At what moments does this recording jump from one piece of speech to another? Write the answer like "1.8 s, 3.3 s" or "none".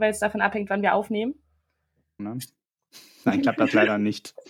2.2 s